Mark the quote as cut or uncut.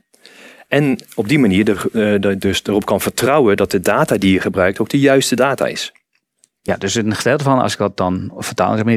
uncut